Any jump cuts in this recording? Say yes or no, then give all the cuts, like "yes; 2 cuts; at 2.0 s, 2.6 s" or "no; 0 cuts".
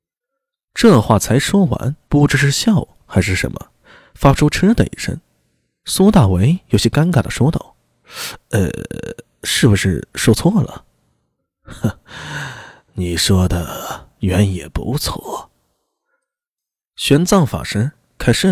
yes; 1 cut; at 2.1 s